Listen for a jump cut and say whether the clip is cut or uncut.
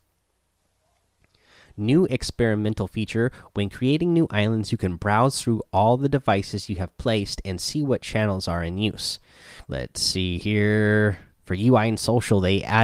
cut